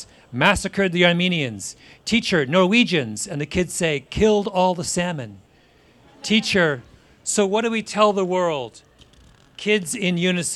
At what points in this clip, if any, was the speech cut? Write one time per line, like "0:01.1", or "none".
none